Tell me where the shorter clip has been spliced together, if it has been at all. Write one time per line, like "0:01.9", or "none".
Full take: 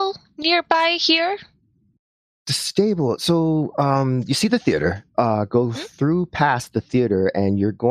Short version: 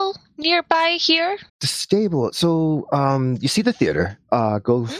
0:01.5